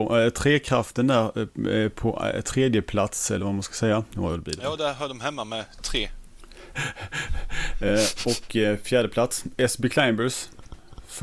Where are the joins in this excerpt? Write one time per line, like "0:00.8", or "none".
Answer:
none